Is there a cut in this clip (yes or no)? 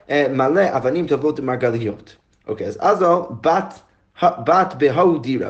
no